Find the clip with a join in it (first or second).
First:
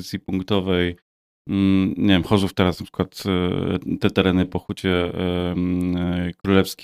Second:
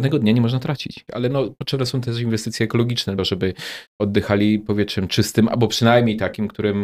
second